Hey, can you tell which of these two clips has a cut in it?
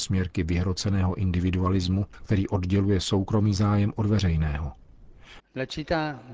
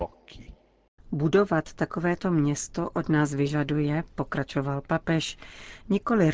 first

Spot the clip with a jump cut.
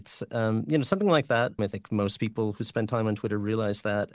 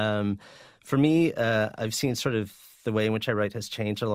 first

